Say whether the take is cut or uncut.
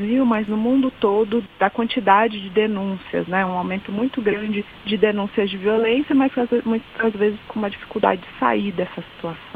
uncut